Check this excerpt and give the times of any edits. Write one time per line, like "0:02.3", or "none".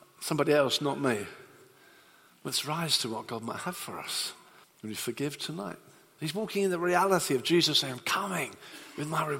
0:04.6
0:06.2